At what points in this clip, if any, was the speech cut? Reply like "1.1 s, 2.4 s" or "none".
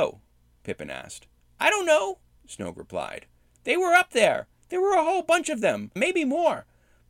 6.0 s